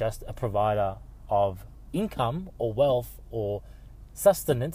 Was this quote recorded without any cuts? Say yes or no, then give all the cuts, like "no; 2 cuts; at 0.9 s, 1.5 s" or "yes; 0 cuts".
yes; 0 cuts